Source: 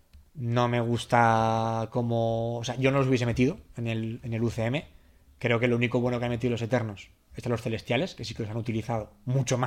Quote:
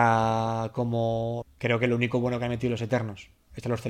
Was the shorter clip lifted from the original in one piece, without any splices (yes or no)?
no